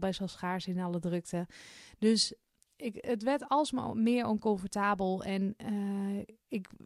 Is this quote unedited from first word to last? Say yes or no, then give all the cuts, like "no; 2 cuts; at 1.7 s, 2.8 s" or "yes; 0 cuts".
yes; 0 cuts